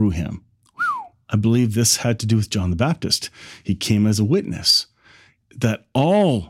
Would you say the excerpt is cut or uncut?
cut